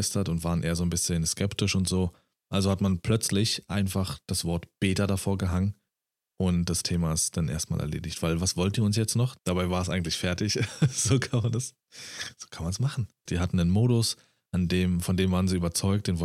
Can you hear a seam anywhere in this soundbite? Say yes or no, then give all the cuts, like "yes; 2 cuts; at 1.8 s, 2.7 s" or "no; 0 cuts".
yes; 2 cuts; at 9.4 s, 13.3 s